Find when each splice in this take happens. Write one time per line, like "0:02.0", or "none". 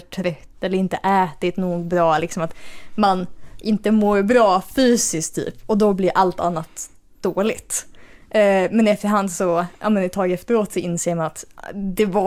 none